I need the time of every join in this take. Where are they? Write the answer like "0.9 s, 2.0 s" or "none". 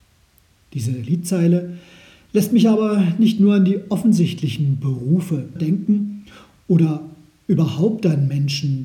5.6 s